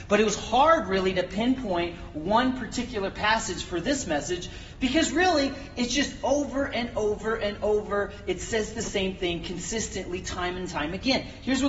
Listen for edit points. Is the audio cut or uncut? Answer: uncut